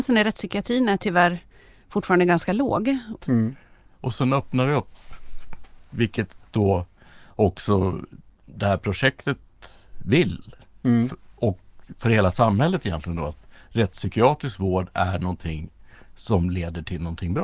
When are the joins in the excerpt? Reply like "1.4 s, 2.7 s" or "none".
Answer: 3.2 s